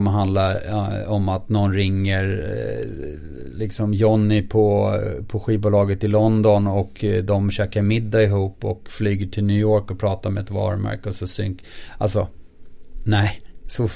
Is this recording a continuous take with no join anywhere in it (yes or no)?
yes